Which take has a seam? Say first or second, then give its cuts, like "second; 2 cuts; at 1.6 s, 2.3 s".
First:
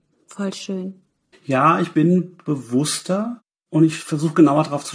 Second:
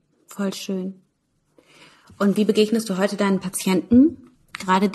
first; 1 cut; at 1.3 s